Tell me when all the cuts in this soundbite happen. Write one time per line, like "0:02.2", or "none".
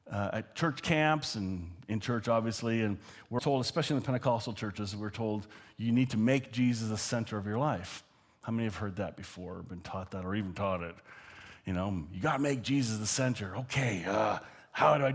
0:03.4